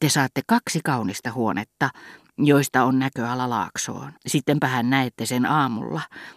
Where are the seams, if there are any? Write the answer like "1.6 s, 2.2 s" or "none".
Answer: 4.2 s